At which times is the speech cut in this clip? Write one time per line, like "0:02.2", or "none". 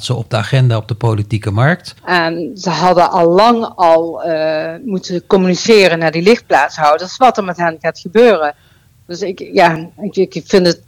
0:02.0